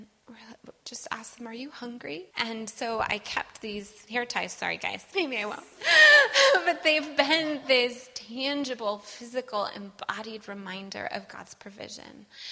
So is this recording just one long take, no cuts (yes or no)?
no